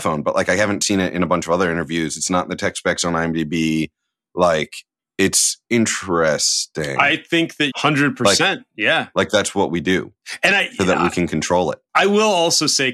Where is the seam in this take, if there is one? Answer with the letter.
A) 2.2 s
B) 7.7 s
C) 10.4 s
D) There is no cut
B